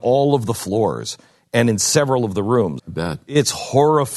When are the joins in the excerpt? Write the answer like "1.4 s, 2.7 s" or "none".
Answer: 2.8 s

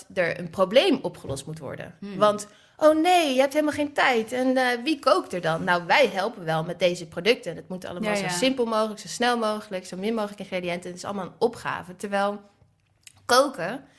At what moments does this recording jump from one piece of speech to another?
none

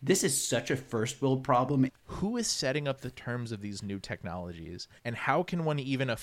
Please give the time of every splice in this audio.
1.9 s, 5.0 s

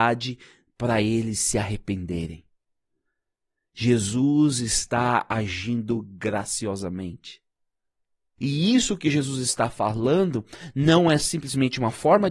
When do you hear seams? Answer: 8.4 s

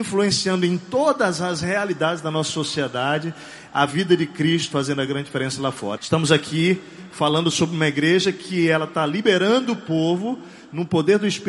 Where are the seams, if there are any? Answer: 4.7 s, 6.0 s

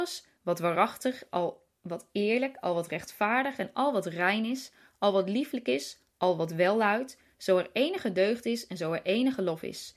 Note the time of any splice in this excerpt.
none

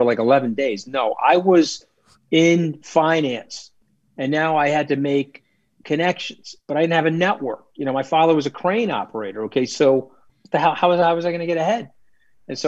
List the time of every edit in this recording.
none

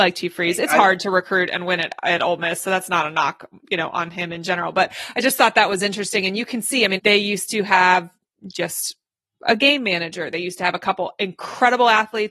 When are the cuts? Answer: 7.0 s

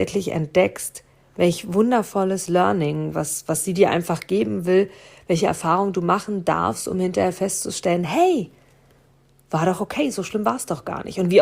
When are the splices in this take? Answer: none

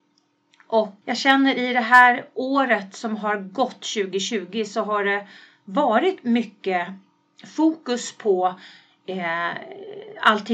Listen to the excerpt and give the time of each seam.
none

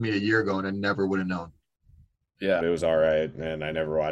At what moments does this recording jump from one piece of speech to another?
2.6 s

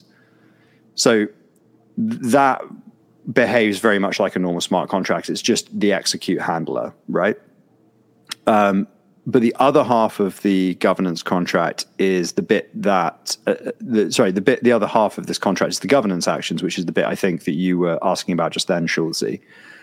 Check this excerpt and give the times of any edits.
none

